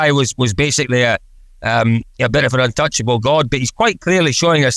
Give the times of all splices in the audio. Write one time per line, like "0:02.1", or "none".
none